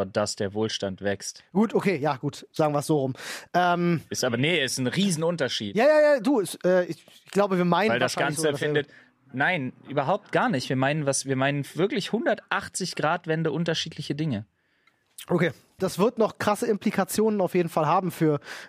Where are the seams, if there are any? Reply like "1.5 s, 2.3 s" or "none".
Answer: 2.5 s, 15.8 s